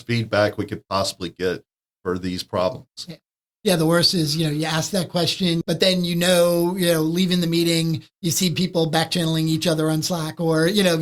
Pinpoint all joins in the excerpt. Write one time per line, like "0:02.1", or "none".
0:05.6